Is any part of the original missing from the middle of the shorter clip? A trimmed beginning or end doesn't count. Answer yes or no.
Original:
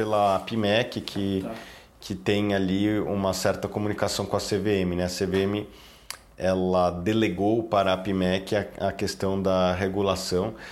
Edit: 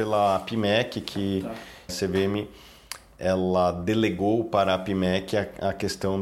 yes